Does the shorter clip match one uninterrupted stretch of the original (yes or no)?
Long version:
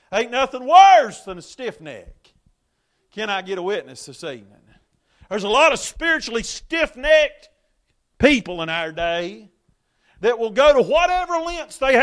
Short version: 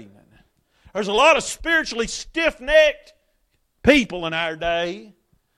yes